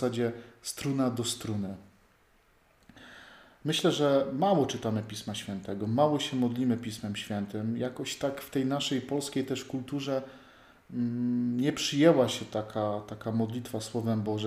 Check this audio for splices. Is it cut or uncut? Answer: uncut